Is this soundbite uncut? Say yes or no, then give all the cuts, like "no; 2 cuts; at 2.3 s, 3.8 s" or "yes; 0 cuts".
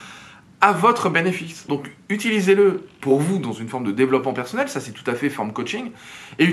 no; 1 cut; at 1.7 s